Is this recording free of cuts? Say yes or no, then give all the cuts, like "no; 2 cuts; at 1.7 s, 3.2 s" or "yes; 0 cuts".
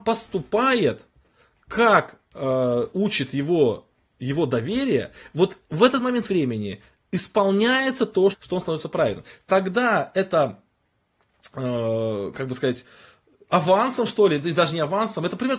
no; 1 cut; at 8.3 s